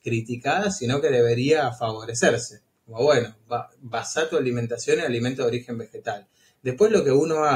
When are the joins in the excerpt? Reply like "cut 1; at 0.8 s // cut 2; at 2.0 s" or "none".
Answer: none